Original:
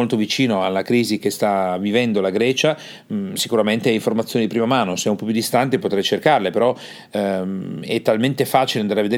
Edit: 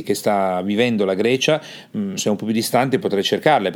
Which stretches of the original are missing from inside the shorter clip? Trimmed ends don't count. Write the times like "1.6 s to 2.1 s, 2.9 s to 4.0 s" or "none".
3.3 s to 5.0 s

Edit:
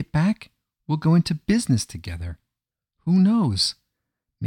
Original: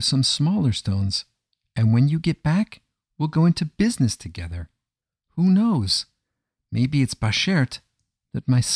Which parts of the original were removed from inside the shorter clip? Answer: none

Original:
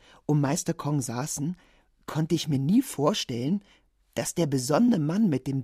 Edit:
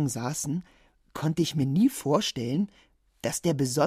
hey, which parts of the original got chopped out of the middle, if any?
none

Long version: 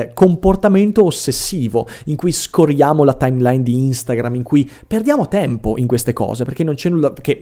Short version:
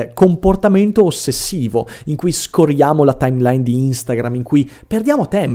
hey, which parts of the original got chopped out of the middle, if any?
none

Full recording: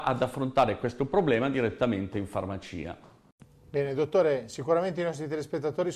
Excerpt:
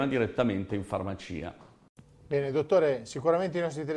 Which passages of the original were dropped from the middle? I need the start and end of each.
none

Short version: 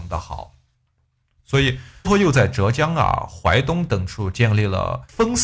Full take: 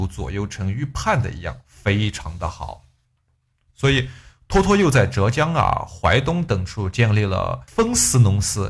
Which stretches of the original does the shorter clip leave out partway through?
4.3 s to 4.6 s

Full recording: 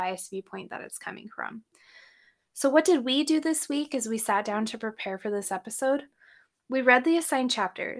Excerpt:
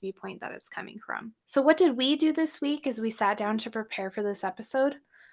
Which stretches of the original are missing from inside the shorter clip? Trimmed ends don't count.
1.7 s to 2.5 s

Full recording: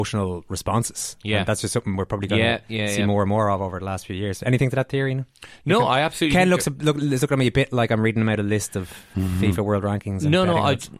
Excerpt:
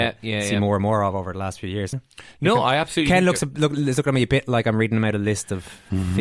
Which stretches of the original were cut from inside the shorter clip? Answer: 4.4 s to 5.2 s

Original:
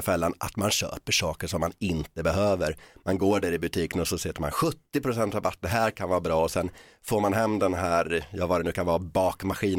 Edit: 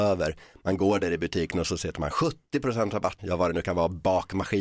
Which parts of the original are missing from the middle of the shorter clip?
5.6 s to 8.3 s

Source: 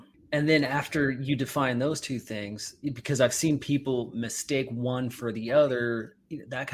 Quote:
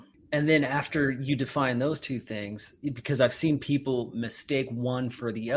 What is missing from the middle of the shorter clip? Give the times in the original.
none

